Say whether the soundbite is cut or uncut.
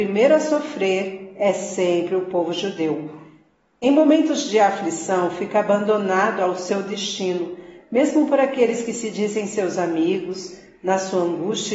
uncut